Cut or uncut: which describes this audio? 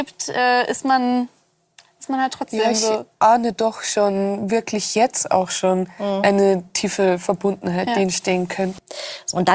uncut